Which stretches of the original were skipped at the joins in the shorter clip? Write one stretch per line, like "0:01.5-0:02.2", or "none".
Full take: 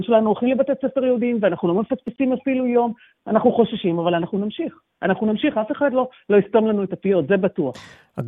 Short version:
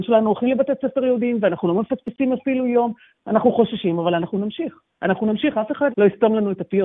0:05.9-0:06.2